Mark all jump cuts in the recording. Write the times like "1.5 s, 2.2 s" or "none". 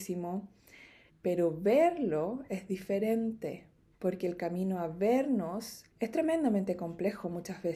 1.1 s, 5.9 s